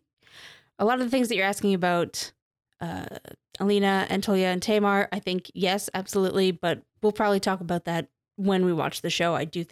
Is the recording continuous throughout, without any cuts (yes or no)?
yes